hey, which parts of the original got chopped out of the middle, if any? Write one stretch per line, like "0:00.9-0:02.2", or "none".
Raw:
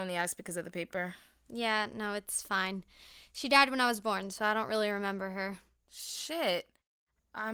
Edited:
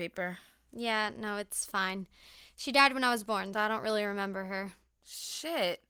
0:04.3-0:04.4